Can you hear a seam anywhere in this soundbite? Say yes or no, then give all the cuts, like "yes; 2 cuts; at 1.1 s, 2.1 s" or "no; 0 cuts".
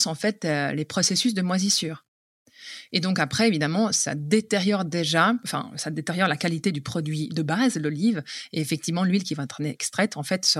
no; 0 cuts